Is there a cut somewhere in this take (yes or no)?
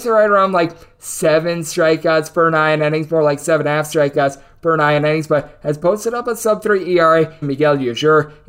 yes